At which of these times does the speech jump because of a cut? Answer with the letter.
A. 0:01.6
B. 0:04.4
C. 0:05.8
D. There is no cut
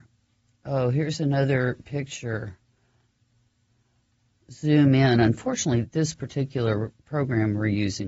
C